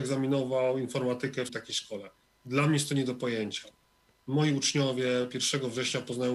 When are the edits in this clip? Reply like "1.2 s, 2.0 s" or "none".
1.5 s